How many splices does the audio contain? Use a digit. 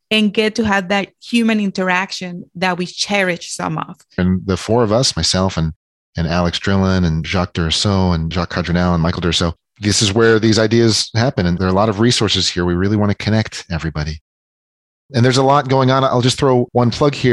1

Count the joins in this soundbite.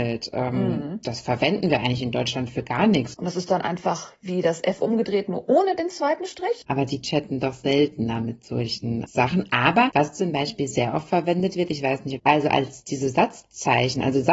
3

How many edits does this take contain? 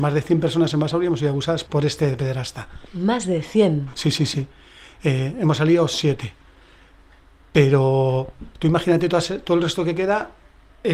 1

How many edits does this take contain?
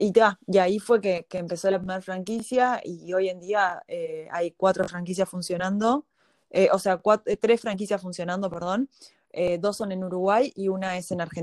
0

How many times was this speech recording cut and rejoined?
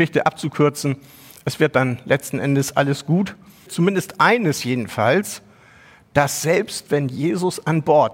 1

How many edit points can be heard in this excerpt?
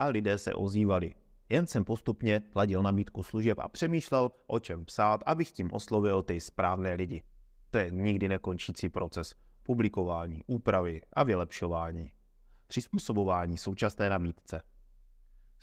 0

